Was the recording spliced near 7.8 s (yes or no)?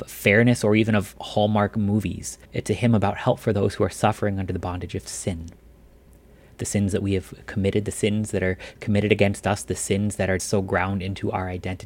no